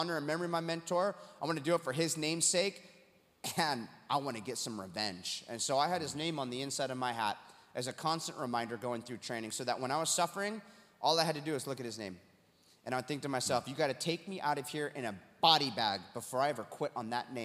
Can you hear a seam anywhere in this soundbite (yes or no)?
no